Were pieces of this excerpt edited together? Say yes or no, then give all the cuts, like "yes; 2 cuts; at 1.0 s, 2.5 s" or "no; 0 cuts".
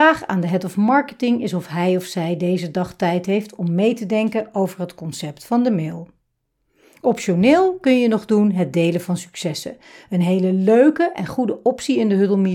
no; 0 cuts